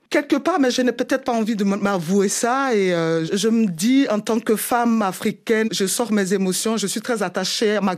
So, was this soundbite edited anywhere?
yes; 2 cuts; at 3.3 s, 5.6 s

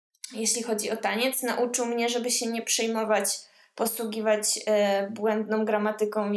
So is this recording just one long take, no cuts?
yes; 0 cuts

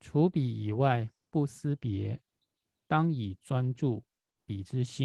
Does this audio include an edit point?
no; 0 cuts

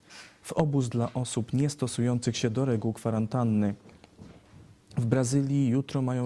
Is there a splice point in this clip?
no; 0 cuts

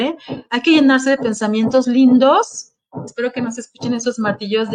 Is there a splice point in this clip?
no; 0 cuts

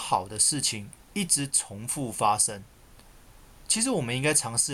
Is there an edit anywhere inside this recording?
no; 0 cuts

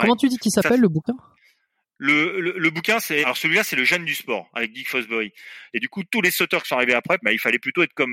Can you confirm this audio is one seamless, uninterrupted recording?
no; 3 cuts; at 3.2 s, 5.7 s, 7.2 s

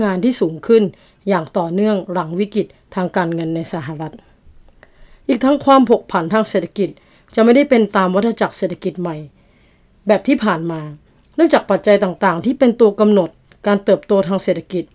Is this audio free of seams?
yes; 0 cuts

